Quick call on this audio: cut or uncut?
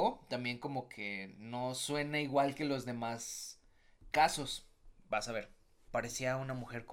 cut